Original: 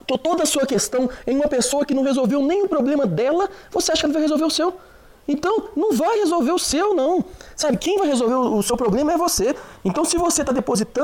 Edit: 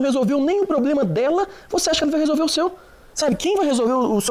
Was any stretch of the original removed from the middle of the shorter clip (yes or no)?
yes